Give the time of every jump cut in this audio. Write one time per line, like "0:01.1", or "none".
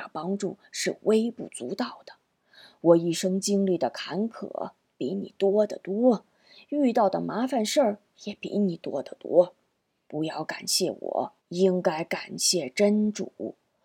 0:10.1
0:11.4